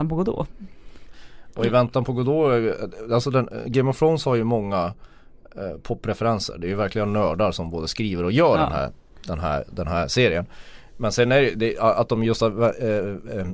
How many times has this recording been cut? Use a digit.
0